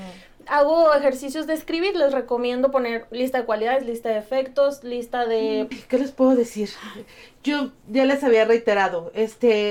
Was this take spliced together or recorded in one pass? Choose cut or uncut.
cut